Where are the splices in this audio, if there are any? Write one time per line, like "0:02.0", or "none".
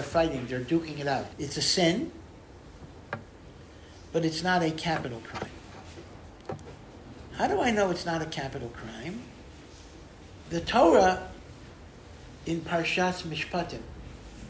0:01.3
0:10.4